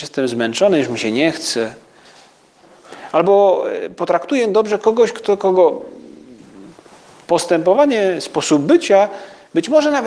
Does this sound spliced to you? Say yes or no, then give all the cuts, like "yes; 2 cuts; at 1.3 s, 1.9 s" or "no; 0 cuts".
no; 0 cuts